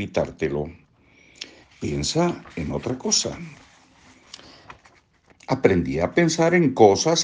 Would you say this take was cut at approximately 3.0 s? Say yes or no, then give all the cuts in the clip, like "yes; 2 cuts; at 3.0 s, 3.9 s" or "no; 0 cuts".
no; 2 cuts; at 1.6 s, 5.3 s